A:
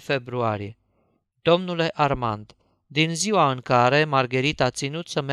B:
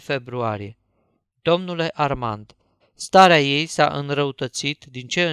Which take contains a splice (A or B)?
B